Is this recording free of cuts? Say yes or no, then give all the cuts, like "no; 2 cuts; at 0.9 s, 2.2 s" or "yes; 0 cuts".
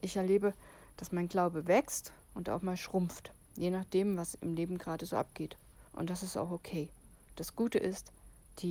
no; 1 cut; at 5.9 s